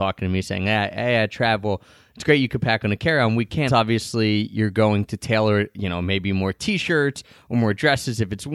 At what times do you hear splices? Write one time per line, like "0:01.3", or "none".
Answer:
0:03.7